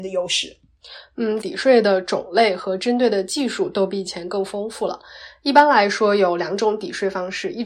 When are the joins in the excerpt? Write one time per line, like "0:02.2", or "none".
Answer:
0:01.4